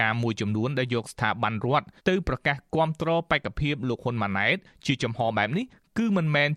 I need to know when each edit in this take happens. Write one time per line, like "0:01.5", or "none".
0:02.0